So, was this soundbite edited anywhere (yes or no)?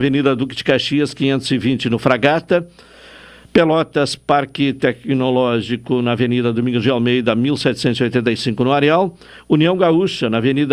no